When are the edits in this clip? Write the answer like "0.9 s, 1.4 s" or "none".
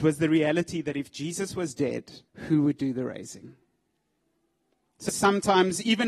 2.3 s, 5.1 s